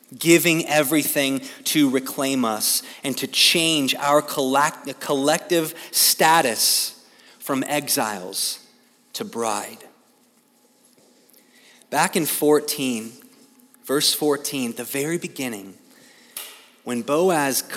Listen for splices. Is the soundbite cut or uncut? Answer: uncut